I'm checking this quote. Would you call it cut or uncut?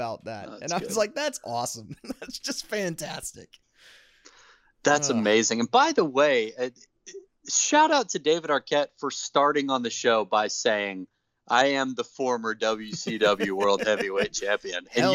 uncut